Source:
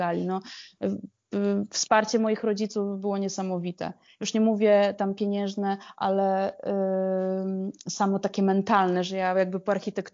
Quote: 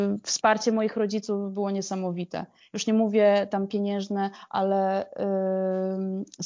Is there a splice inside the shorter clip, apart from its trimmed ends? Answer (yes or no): no